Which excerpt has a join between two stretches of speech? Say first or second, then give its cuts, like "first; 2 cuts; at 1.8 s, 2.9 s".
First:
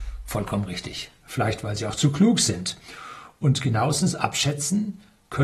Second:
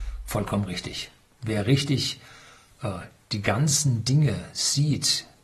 first; 1 cut; at 1.2 s